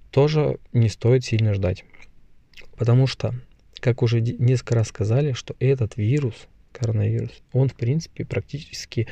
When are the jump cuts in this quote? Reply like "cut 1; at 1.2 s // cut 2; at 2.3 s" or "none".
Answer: cut 1; at 2.8 s